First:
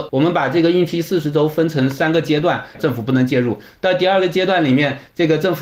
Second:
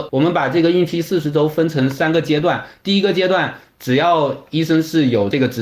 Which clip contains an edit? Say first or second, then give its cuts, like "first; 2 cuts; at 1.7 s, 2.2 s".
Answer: first; 1 cut; at 2.7 s